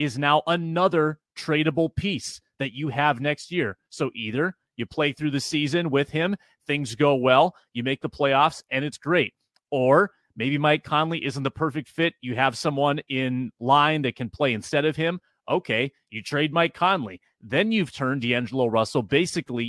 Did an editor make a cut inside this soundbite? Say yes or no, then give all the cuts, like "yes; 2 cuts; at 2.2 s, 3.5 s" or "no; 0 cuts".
no; 0 cuts